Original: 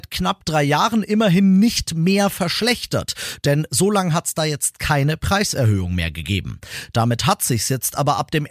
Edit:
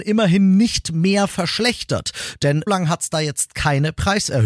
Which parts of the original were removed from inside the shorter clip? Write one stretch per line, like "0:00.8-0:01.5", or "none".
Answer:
0:03.7-0:03.9